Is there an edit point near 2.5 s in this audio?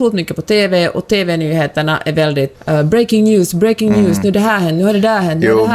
yes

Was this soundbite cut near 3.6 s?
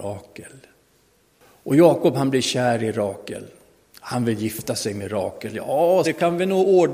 no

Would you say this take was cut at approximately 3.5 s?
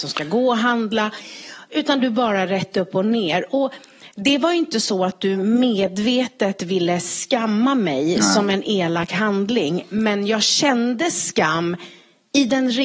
no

